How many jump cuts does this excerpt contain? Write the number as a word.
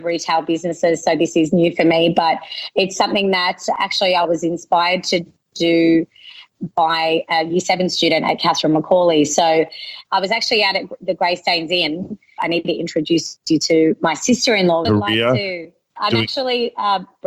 two